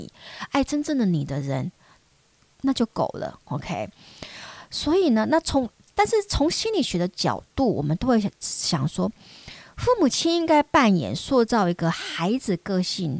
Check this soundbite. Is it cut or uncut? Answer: uncut